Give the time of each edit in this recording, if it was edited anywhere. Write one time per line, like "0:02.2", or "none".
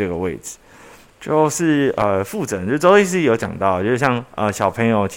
0:01.1